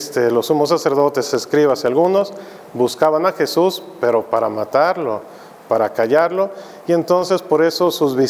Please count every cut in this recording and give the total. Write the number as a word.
zero